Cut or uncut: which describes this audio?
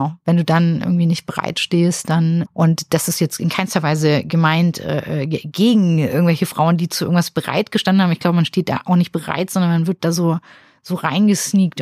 cut